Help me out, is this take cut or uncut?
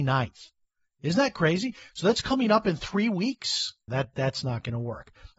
cut